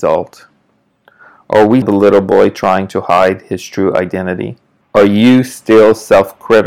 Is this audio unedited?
no; 2 cuts; at 1.8 s, 4.8 s

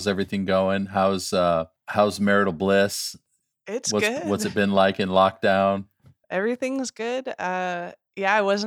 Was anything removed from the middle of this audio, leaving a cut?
no; 0 cuts

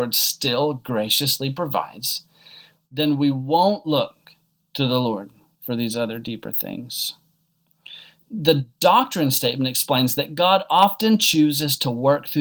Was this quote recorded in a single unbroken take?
no; 1 cut; at 8.2 s

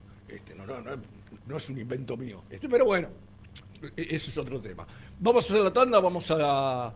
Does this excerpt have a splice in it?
yes; 1 cut; at 2.5 s

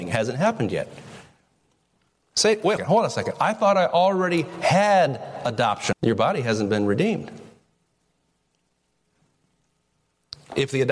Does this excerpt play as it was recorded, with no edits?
no; 2 cuts; at 2.8 s, 5.9 s

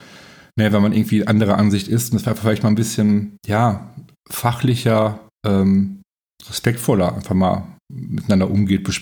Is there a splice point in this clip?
no; 0 cuts

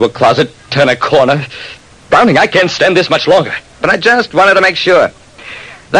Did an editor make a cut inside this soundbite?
yes; 1 cut; at 3.7 s

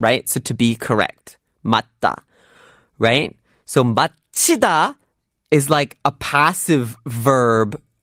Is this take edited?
no; 0 cuts

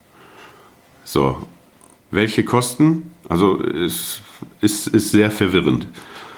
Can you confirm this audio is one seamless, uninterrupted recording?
no; 1 cut; at 2.0 s

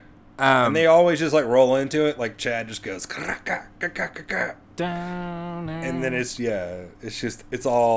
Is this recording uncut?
no; 1 cut; at 6.4 s

